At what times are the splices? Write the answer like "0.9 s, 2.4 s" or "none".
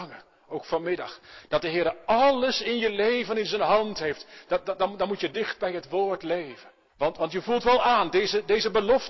6.9 s